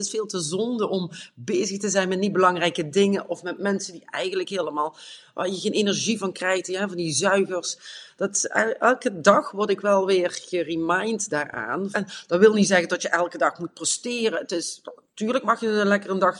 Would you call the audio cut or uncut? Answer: cut